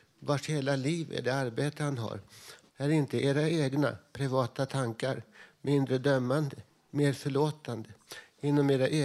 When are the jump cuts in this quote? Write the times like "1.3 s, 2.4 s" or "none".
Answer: 2.7 s

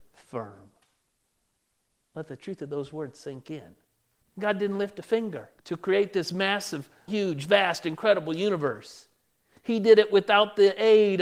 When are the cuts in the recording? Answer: 4.2 s, 5.6 s, 7.1 s

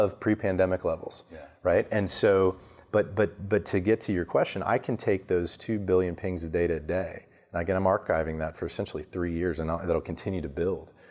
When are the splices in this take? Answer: none

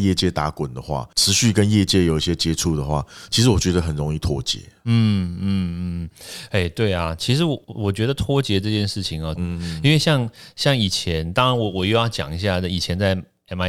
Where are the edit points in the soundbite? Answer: 7.6 s, 9.4 s

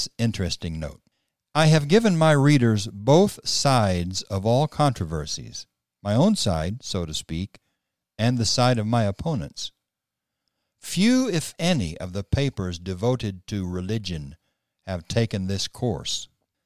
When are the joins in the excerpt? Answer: none

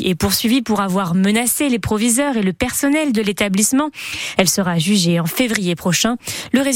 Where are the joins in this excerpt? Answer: 4.4 s

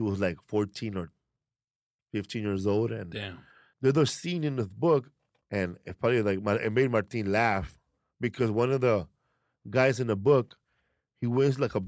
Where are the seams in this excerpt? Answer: 3.7 s, 5.4 s

